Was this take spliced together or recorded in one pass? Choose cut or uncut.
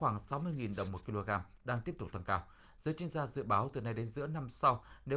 uncut